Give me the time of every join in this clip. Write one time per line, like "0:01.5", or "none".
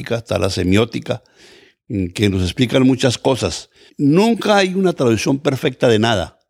0:03.9